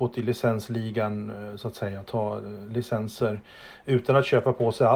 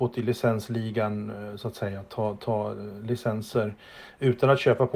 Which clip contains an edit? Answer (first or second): first